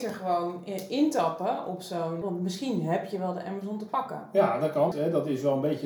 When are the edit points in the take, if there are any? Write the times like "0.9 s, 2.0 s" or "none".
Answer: 2.2 s, 4.9 s